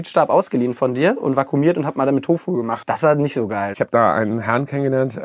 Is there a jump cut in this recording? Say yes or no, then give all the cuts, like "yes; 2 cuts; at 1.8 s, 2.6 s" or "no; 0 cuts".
yes; 1 cut; at 3.7 s